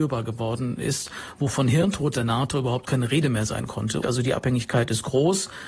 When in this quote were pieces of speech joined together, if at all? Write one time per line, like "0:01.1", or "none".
0:04.0